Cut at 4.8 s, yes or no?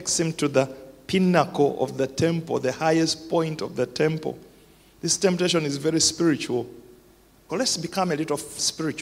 no